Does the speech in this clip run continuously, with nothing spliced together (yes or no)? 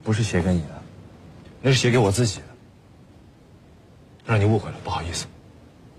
yes